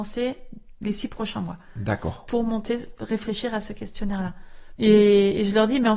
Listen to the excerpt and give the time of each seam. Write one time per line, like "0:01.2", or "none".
0:04.8